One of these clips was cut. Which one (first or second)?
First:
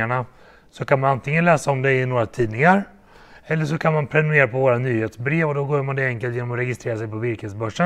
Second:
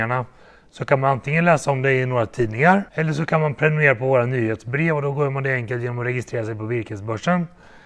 second